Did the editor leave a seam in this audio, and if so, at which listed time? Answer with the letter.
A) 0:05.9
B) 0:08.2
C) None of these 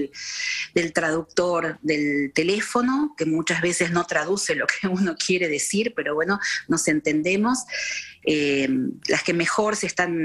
B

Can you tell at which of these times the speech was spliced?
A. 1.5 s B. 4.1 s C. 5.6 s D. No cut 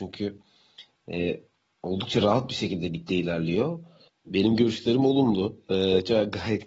B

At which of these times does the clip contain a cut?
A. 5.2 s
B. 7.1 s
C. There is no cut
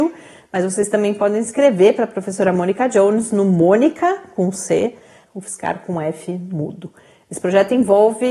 A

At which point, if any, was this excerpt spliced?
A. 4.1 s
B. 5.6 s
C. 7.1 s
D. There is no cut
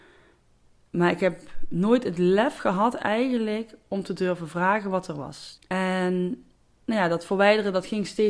B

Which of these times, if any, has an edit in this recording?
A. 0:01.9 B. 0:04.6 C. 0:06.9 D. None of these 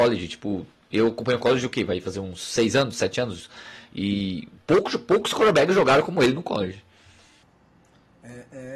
B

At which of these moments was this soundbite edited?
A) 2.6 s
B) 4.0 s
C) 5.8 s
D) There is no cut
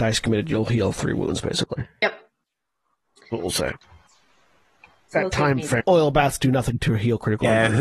C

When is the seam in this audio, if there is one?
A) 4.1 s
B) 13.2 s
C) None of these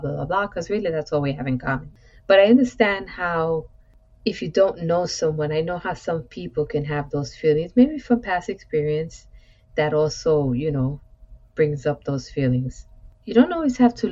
B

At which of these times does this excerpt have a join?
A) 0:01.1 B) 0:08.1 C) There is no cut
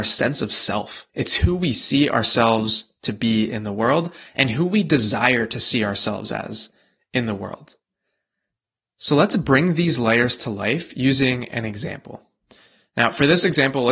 A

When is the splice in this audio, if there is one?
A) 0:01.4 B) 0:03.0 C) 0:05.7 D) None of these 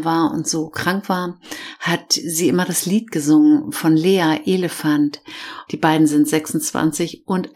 C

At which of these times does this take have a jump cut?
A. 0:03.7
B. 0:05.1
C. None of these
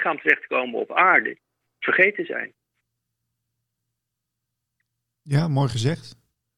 C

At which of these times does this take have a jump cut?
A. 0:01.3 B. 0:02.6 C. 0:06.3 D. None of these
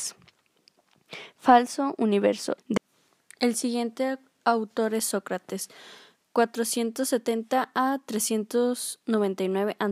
B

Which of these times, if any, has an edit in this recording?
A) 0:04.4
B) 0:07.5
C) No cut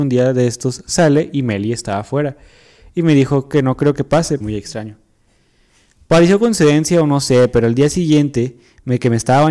A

